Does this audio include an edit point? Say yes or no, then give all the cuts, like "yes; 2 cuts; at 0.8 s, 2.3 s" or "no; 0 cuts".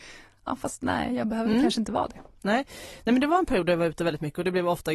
no; 0 cuts